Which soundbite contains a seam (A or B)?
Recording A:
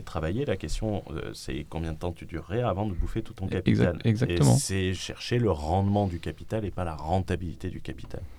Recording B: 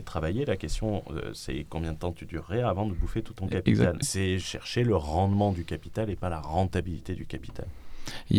B